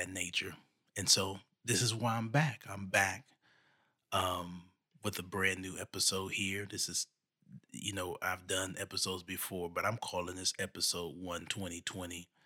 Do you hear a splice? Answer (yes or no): no